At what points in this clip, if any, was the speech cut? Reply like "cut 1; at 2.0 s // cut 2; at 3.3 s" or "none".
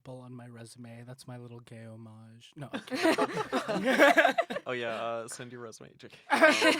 none